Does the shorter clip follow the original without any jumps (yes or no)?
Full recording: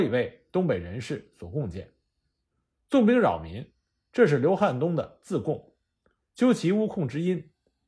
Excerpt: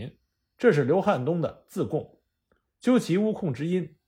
yes